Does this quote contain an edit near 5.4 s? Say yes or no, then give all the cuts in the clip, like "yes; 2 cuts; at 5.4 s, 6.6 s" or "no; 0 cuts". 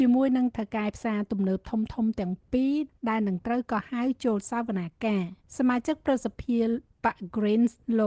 yes; 1 cut; at 5.4 s